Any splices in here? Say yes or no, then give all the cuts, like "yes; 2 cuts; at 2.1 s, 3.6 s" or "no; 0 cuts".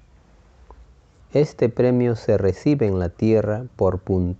yes; 1 cut; at 1.2 s